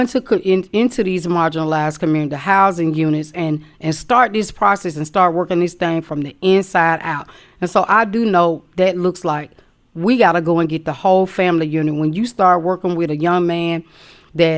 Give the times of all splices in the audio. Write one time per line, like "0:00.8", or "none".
none